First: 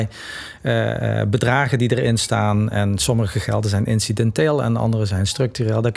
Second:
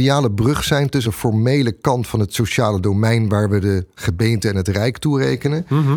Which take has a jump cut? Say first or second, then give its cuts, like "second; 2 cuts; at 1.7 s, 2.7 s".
second; 1 cut; at 1.0 s